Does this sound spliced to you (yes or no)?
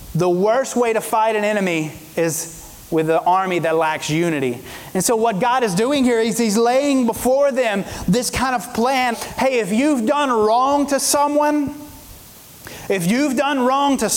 yes